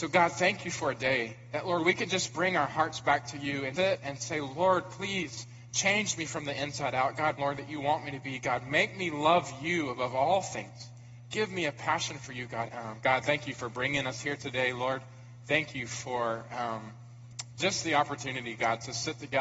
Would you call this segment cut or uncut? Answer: cut